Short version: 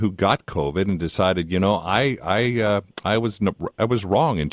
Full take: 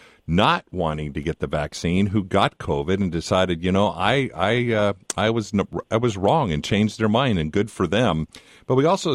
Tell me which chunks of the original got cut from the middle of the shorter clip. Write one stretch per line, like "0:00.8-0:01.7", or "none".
none